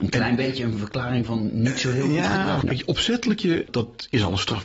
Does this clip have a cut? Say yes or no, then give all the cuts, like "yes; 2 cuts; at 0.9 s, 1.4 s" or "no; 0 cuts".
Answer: yes; 2 cuts; at 2.6 s, 3.6 s